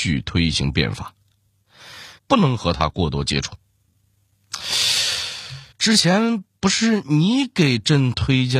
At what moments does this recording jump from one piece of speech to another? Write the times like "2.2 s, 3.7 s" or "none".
2.2 s, 5.7 s